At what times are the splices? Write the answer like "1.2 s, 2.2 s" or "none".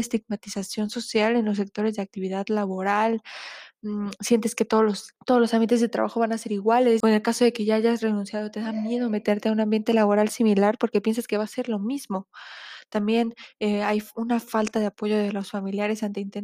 5.2 s, 7.0 s